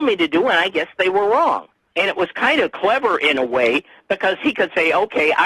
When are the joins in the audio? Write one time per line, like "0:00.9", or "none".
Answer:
0:01.9